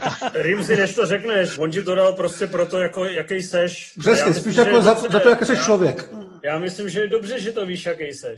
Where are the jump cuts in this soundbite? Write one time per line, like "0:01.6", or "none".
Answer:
0:01.6